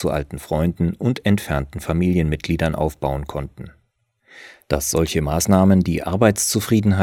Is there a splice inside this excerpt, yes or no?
no